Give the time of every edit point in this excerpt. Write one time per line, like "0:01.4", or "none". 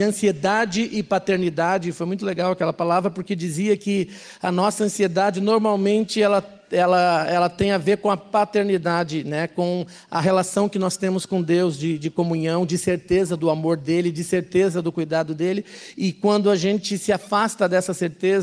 none